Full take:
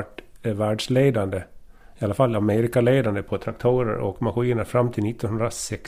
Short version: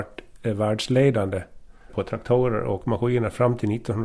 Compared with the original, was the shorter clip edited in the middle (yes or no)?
yes